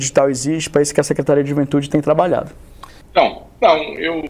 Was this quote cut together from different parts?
yes; 1 cut; at 3.0 s

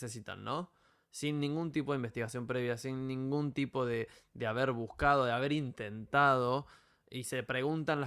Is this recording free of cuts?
yes; 0 cuts

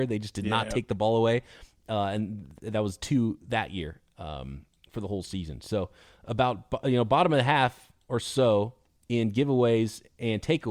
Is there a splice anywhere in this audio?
no; 0 cuts

